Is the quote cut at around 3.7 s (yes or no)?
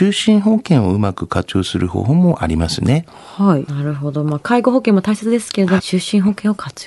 yes